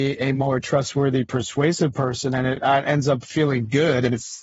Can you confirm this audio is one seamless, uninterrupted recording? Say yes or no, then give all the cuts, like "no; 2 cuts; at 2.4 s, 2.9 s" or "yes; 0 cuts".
yes; 0 cuts